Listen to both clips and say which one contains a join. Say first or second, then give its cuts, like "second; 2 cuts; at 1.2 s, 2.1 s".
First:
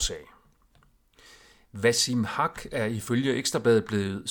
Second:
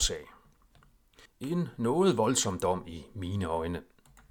second; 1 cut; at 1.3 s